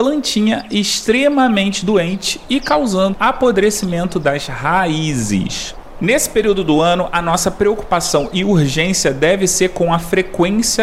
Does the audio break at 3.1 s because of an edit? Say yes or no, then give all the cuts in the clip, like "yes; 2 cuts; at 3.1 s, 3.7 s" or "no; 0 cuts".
yes; 1 cut; at 3.1 s